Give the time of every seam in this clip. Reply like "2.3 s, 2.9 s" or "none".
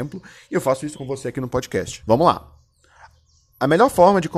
0.9 s, 2.0 s